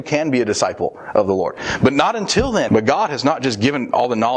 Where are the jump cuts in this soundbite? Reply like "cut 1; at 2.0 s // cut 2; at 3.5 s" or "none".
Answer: cut 1; at 2.7 s